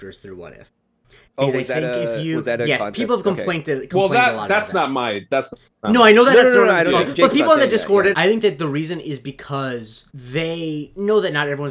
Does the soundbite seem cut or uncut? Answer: cut